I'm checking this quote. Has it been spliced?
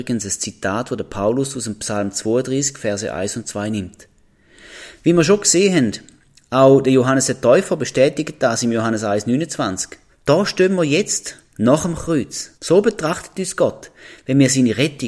yes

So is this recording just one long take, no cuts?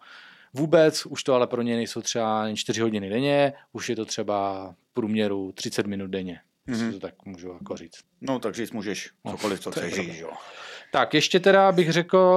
no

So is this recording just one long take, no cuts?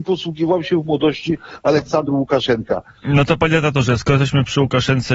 no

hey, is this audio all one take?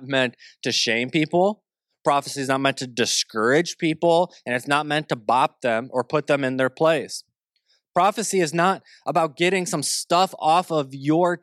yes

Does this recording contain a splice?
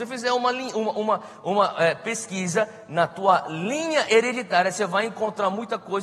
no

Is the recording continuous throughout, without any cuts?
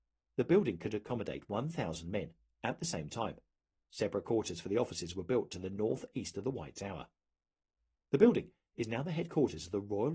yes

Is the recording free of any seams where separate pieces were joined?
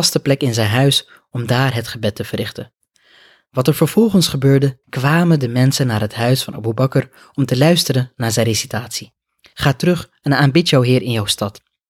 no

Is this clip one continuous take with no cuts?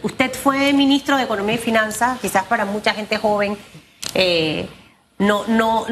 yes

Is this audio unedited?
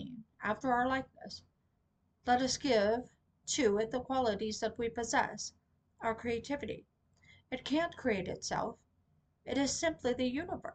yes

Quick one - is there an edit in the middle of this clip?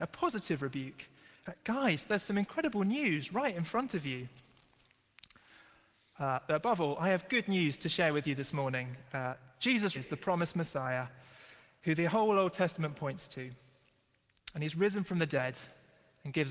yes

